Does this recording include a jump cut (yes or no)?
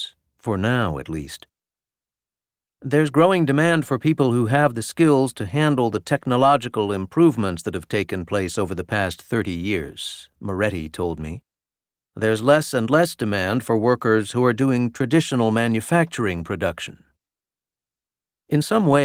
no